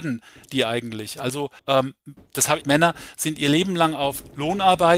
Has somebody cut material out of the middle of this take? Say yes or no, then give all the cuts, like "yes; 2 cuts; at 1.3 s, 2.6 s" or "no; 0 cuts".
yes; 2 cuts; at 1.6 s, 2.6 s